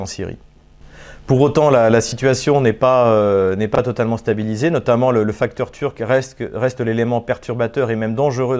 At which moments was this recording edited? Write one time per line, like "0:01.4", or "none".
none